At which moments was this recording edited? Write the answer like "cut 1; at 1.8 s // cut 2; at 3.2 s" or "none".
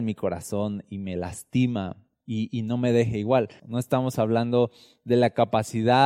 cut 1; at 3.6 s